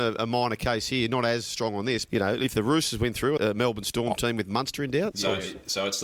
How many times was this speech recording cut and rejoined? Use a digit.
3